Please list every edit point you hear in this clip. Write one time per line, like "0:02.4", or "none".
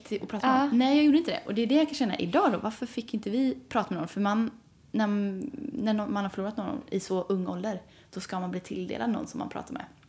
none